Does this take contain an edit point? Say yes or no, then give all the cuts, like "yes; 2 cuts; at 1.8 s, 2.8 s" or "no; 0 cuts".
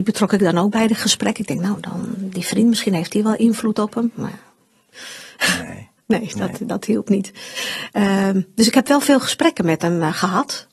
no; 0 cuts